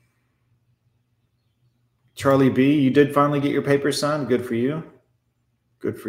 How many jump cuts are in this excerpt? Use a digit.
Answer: 0